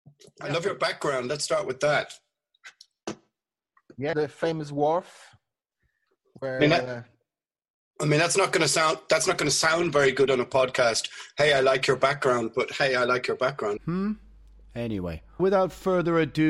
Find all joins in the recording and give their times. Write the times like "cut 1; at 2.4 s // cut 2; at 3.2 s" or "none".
cut 1; at 4.1 s // cut 2; at 13.8 s // cut 3; at 15.4 s